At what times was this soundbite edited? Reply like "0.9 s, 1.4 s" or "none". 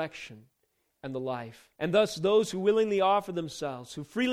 1.7 s

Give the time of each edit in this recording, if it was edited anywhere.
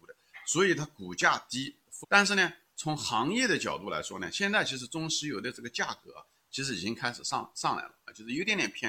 2.0 s

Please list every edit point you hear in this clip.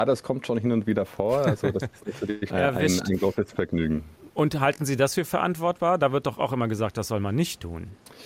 2.5 s

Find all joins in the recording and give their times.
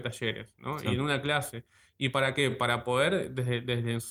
none

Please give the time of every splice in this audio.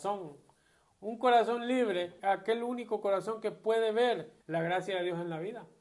2.2 s, 4.4 s

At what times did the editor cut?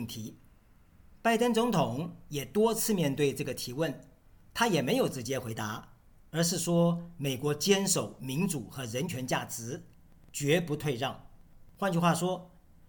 none

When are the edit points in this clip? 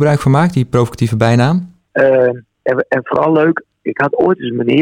1.9 s

